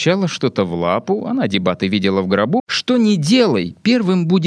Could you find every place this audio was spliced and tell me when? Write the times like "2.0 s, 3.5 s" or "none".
2.6 s